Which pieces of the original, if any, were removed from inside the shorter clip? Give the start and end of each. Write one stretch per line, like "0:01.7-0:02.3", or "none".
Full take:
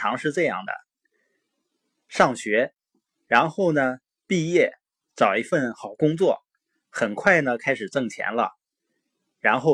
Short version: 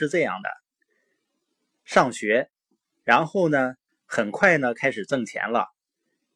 0:04.1-0:06.7